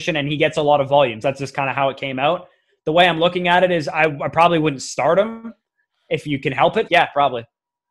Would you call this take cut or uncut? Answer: cut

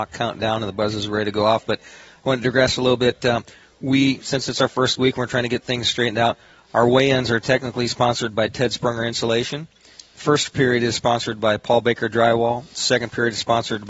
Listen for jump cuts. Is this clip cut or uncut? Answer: uncut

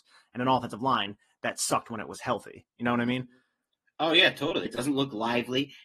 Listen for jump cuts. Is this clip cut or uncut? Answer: cut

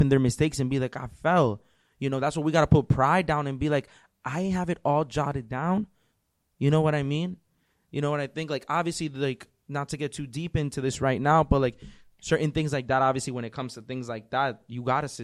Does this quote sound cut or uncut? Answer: uncut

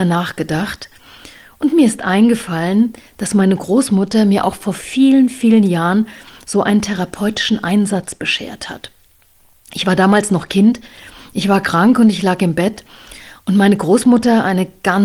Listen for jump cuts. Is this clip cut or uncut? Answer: uncut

